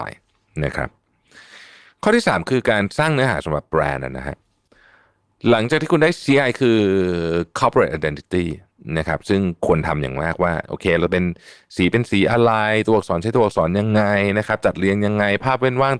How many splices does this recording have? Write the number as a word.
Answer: one